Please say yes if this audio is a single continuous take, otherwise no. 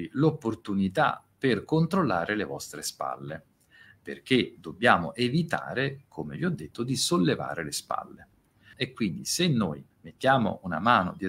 no